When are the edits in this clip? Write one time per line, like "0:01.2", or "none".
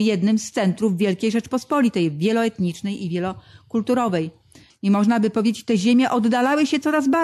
0:04.7